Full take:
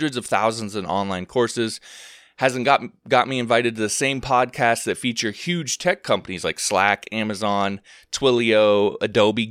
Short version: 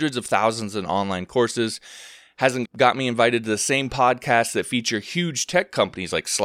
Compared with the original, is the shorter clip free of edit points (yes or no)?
no